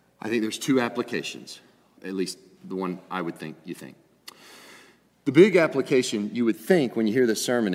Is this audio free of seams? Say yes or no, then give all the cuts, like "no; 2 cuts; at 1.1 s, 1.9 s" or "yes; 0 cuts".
no; 1 cut; at 2.0 s